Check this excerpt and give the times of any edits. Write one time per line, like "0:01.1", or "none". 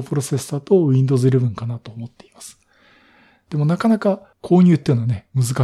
0:03.5